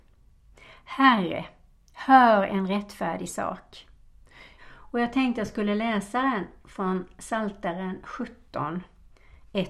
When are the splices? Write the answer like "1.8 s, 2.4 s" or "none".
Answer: 4.6 s